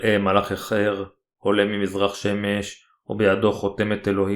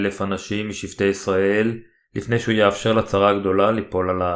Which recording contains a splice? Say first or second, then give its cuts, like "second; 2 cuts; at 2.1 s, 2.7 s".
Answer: second; 1 cut; at 2.0 s